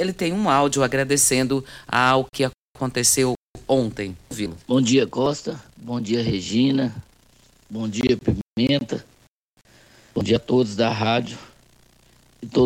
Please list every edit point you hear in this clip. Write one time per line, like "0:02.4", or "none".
none